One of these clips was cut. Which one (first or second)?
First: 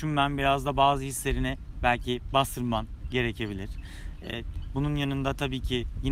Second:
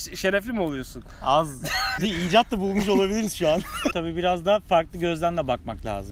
second